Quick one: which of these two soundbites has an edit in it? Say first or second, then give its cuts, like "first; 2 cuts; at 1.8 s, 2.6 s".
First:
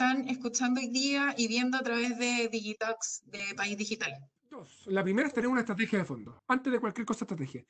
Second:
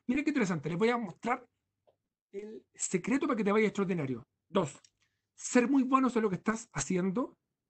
first; 2 cuts; at 4.4 s, 6.4 s